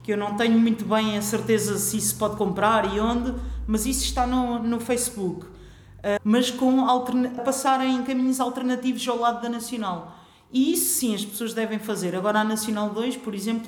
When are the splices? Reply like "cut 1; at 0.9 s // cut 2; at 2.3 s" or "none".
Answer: cut 1; at 6.2 s // cut 2; at 7.4 s